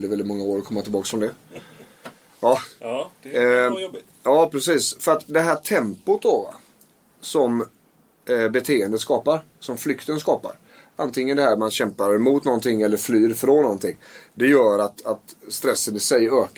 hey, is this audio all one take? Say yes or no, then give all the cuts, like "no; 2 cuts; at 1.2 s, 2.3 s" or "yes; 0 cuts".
yes; 0 cuts